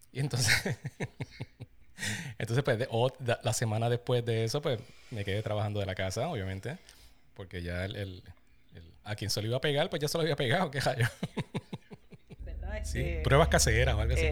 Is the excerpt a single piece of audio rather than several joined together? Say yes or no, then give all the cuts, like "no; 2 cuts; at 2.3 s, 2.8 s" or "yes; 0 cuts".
no; 2 cuts; at 9.0 s, 12.4 s